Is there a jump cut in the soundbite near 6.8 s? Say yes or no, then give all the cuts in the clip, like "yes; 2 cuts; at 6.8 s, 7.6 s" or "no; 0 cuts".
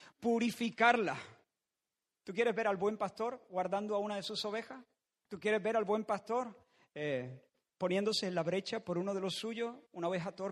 no; 0 cuts